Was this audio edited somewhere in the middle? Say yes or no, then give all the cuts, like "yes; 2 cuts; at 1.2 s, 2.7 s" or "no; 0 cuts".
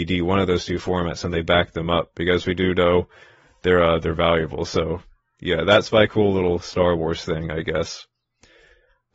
no; 0 cuts